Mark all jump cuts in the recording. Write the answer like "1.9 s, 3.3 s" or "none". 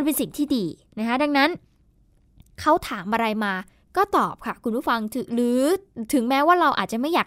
none